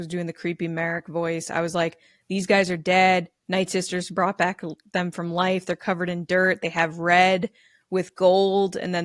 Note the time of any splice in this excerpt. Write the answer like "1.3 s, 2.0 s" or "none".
none